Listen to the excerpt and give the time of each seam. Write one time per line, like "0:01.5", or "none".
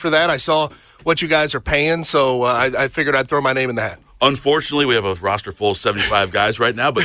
none